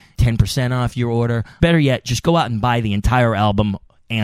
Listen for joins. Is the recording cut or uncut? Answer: cut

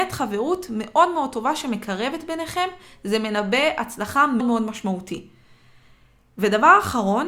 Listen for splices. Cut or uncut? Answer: cut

